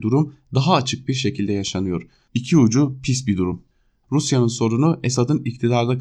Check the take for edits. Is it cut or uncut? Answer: cut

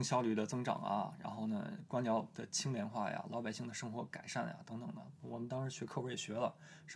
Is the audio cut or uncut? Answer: uncut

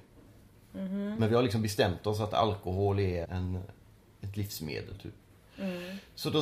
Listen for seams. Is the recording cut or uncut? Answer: cut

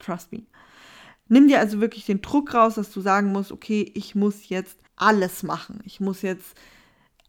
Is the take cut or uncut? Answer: cut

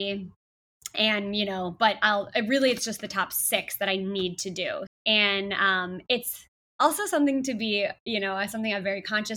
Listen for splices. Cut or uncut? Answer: cut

